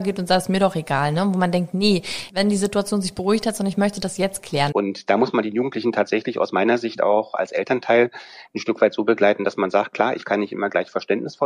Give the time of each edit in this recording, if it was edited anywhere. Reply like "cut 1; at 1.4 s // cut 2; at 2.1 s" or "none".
cut 1; at 2.3 s // cut 2; at 4.7 s